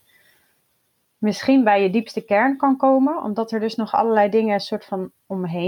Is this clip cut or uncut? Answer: uncut